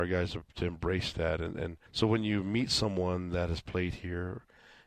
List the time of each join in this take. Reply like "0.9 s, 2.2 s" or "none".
1.9 s